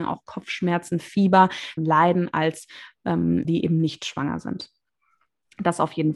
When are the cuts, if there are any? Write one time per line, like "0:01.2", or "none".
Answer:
0:01.8
0:03.4